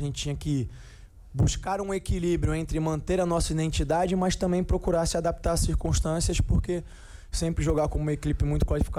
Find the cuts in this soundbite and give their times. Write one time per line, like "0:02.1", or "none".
none

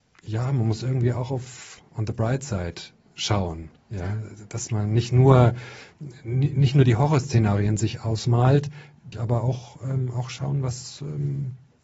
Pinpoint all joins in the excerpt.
0:09.1

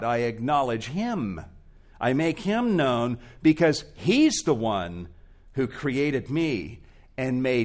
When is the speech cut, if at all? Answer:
none

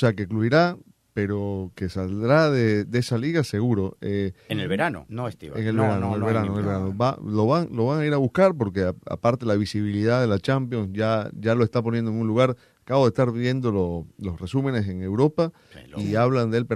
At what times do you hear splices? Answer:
0:05.1

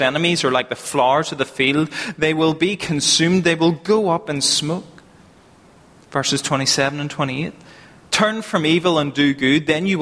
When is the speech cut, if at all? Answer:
none

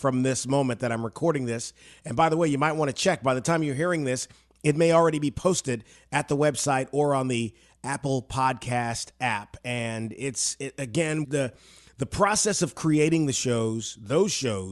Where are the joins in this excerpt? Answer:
0:11.2

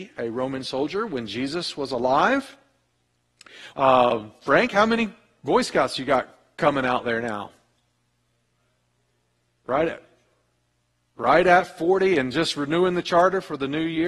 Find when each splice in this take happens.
0:03.7

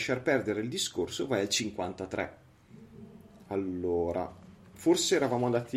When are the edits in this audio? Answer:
none

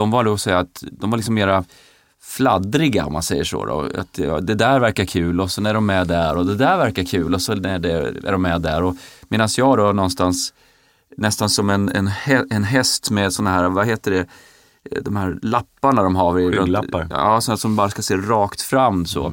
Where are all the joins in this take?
none

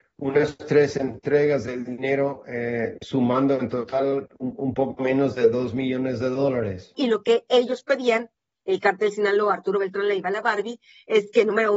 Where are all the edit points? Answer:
none

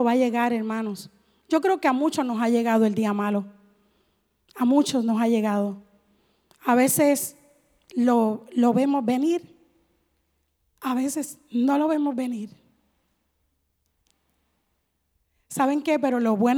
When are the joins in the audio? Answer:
none

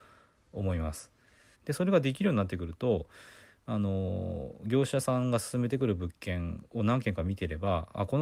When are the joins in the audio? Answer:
0:01.5

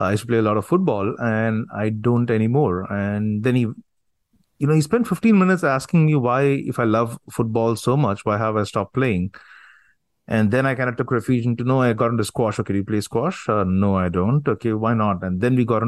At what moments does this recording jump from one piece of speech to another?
none

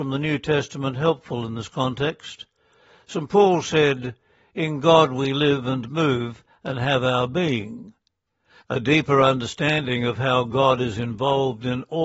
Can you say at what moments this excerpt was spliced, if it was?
0:08.6

